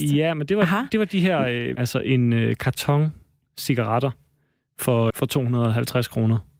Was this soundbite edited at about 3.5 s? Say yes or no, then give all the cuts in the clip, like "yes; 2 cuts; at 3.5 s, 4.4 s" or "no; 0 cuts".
no; 2 cuts; at 1.8 s, 5.1 s